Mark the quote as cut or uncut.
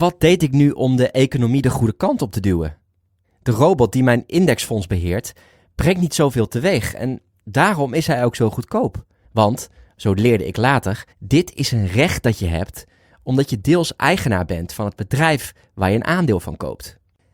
cut